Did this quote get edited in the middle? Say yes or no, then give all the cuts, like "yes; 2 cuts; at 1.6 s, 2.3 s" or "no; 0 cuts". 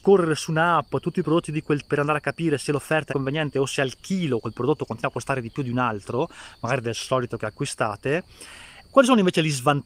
yes; 3 cuts; at 1.8 s, 3.1 s, 8.8 s